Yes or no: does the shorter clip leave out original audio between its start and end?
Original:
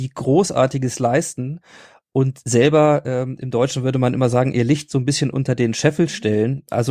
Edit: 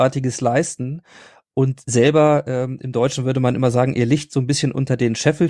no